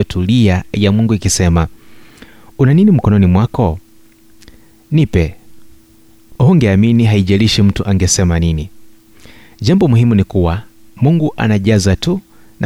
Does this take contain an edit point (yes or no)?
no